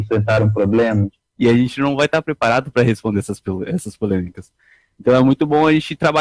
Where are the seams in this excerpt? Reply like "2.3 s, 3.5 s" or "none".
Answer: 1.3 s